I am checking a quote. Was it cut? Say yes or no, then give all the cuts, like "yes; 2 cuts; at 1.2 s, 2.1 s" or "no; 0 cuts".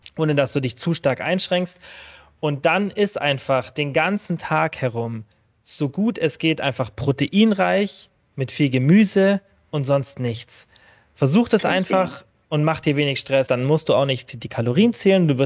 yes; 1 cut; at 13.5 s